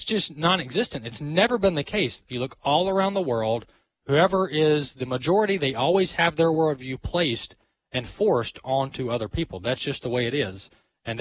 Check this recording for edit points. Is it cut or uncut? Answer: cut